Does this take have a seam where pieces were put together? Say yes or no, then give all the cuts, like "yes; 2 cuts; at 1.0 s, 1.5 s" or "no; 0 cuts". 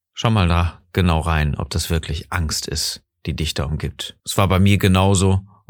yes; 1 cut; at 4.2 s